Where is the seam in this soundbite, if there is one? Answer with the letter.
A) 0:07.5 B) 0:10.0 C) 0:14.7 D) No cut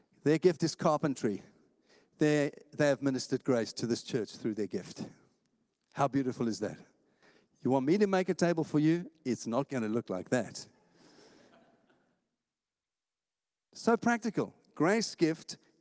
D